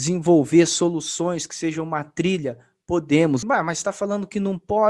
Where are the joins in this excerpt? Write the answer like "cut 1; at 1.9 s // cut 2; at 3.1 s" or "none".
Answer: cut 1; at 3.4 s